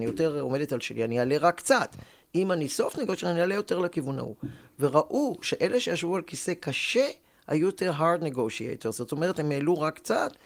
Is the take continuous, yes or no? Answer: yes